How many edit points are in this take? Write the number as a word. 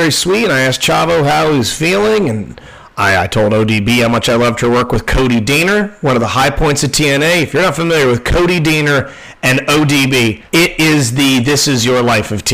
one